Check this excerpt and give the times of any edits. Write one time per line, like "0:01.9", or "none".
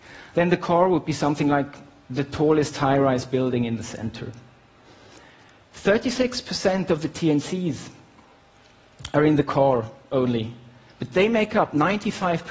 0:05.6